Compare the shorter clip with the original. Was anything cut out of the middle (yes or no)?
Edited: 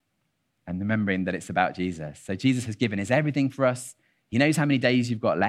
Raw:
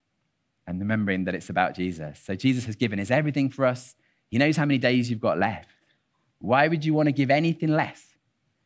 no